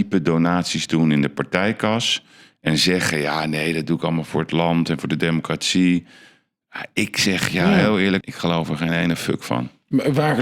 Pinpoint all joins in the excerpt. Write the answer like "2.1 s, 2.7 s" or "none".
8.2 s